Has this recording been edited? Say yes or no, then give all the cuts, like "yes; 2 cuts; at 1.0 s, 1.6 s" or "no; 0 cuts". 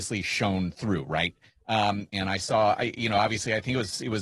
yes; 1 cut; at 2.1 s